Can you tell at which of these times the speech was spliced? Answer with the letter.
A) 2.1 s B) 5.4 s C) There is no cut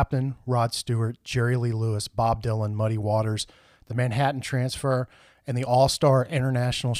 C